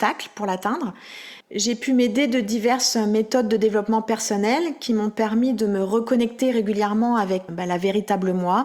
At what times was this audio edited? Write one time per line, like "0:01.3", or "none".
0:01.4
0:07.5